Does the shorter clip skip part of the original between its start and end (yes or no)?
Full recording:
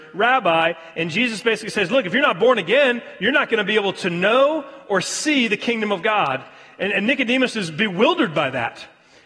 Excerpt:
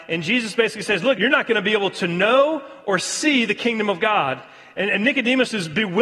yes